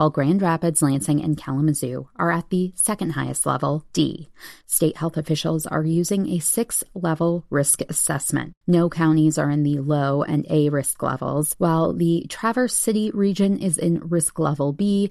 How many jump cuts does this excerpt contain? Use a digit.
2